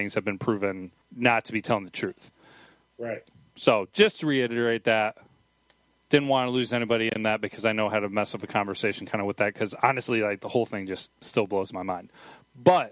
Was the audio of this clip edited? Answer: yes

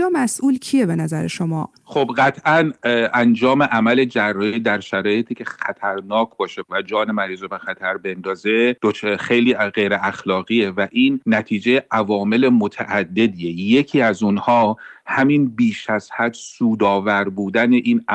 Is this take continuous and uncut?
no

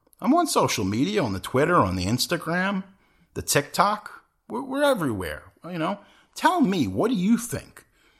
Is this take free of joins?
yes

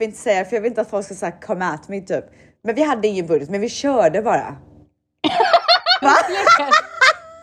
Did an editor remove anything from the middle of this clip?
yes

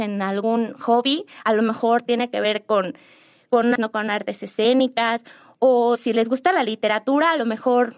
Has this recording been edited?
yes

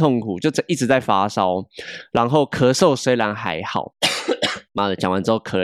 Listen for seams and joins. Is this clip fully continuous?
yes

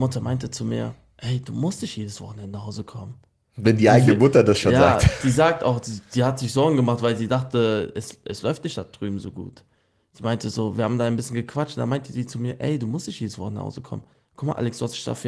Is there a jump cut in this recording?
no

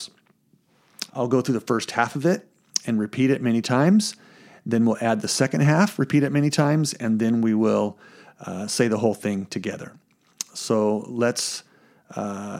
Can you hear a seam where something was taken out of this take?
yes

